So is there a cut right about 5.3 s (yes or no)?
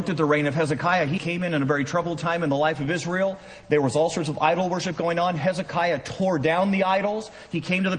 no